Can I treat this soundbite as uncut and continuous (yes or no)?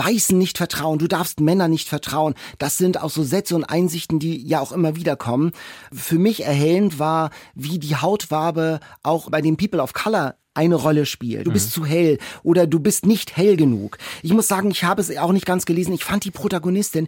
no